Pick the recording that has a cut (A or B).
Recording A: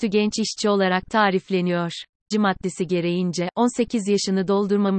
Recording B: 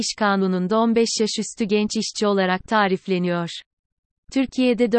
A